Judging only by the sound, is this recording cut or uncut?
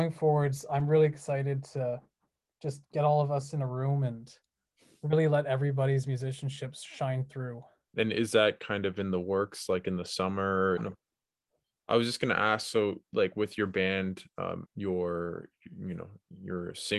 cut